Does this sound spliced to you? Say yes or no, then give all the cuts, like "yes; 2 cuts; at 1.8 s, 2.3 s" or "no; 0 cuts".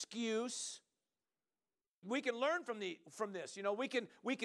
yes; 1 cut; at 2.0 s